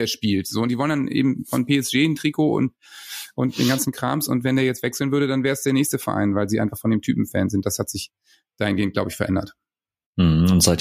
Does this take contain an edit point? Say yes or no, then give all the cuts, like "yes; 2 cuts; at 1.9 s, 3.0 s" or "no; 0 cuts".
no; 0 cuts